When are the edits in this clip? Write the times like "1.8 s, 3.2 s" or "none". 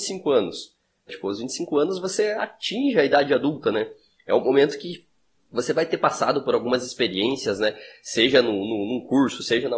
1.1 s